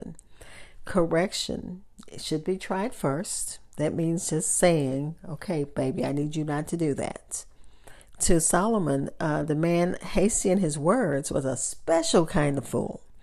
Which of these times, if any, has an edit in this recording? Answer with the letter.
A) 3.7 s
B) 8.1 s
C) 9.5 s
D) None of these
B